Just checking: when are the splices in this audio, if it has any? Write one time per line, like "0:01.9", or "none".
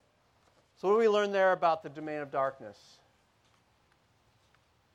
none